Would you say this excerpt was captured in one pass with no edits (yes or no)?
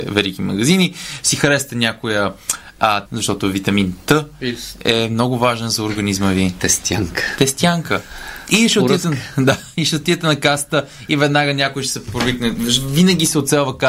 no